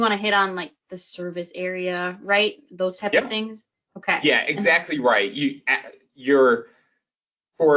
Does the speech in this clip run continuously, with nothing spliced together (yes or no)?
yes